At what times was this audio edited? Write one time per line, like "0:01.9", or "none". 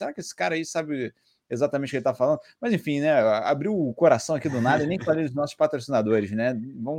none